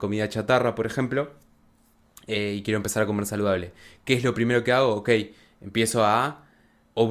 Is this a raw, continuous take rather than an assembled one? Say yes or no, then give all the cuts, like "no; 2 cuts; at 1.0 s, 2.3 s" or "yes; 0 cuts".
yes; 0 cuts